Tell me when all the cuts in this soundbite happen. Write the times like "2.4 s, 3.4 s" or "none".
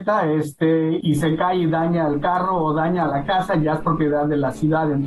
1.0 s